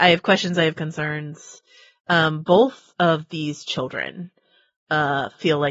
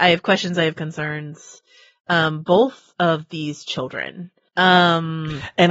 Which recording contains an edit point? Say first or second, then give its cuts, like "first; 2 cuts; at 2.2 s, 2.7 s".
second; 1 cut; at 4.5 s